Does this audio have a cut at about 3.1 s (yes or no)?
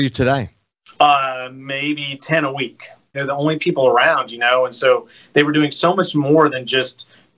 yes